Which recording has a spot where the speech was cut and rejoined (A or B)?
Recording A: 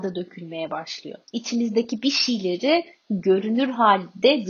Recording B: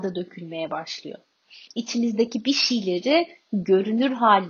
A